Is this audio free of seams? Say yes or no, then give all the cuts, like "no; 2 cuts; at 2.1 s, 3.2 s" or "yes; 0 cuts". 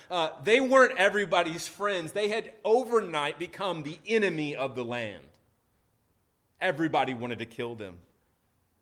yes; 0 cuts